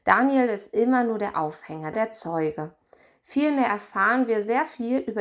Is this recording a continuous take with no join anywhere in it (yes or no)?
no